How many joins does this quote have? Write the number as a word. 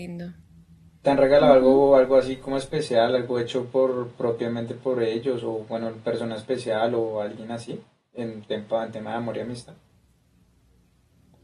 zero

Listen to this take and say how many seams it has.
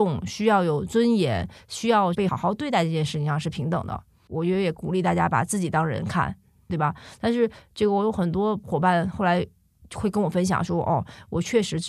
two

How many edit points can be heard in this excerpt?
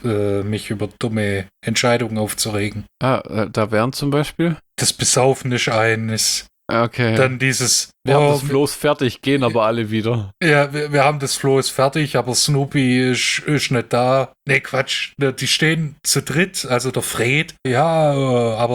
two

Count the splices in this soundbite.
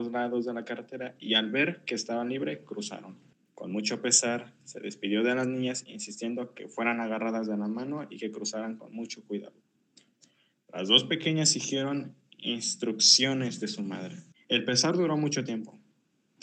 two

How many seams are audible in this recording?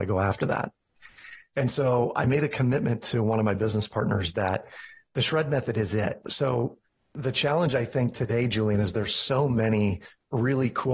one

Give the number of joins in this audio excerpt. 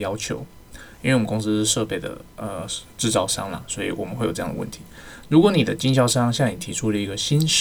one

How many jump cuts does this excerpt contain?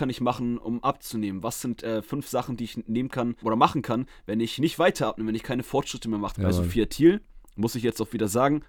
two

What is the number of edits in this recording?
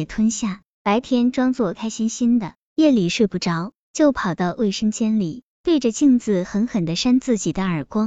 one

